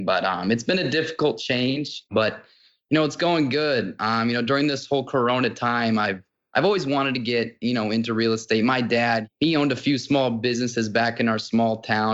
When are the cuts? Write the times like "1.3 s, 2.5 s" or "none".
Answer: none